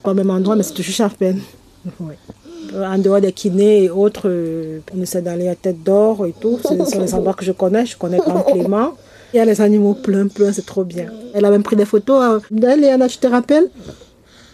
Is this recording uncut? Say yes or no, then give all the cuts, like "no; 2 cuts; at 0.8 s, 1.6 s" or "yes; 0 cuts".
yes; 0 cuts